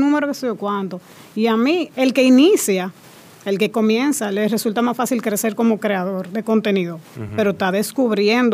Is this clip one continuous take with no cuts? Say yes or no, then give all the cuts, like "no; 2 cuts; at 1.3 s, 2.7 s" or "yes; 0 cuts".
yes; 0 cuts